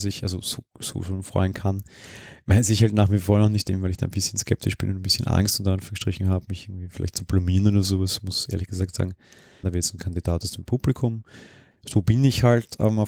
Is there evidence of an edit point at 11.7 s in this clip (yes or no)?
yes